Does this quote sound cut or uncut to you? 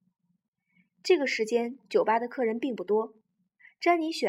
uncut